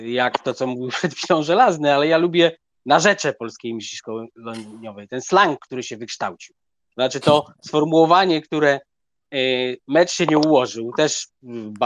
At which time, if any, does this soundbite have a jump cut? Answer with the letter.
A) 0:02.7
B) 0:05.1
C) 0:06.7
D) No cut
D